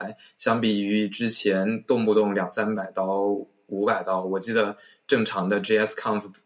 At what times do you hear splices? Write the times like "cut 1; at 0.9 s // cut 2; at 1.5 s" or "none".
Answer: none